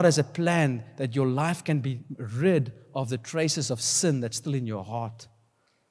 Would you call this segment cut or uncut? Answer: uncut